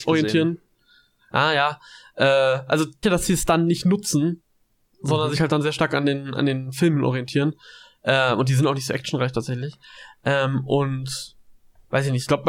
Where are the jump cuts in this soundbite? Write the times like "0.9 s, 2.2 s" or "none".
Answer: 3.0 s